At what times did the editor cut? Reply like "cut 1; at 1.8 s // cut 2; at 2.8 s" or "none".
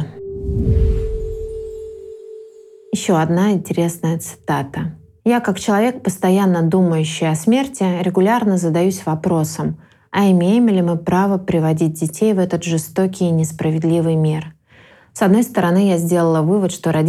cut 1; at 5.2 s